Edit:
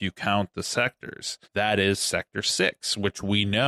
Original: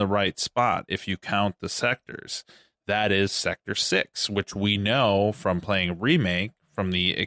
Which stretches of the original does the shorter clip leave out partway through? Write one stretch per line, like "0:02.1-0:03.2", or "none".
0:02.5-0:02.8